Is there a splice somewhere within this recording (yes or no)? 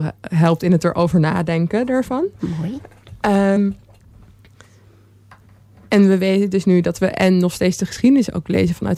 no